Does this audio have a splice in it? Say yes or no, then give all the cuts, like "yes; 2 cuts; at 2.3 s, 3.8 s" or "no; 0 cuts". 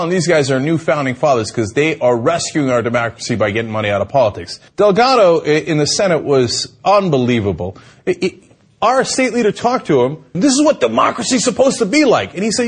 yes; 2 cuts; at 4.7 s, 10.3 s